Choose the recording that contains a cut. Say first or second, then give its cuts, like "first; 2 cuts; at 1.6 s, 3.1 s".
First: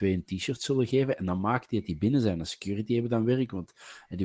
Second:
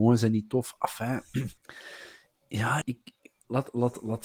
second; 2 cuts; at 1.6 s, 2.8 s